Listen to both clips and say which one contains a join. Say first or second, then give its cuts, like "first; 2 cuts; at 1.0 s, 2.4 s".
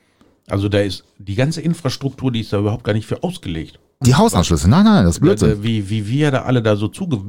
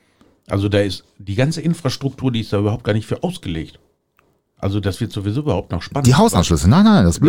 first; 1 cut; at 4.0 s